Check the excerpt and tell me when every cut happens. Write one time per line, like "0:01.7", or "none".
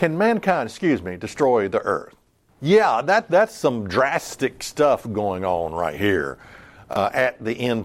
0:02.5